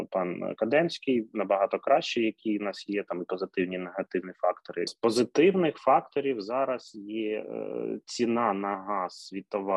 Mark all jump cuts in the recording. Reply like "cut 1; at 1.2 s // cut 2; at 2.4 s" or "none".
cut 1; at 4.9 s